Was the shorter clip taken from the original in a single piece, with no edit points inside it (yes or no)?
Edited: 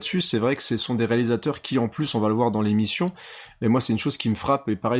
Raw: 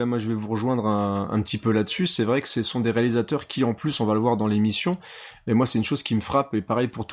yes